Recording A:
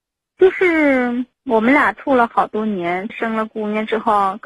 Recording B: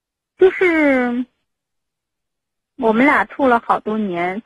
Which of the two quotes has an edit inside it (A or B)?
A